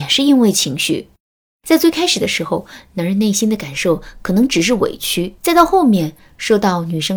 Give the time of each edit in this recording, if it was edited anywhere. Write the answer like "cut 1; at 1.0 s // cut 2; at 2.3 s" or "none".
cut 1; at 5.4 s